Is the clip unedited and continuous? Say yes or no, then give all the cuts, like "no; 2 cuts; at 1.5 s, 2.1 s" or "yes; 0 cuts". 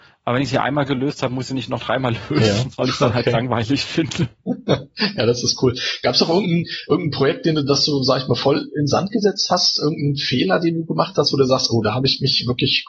yes; 0 cuts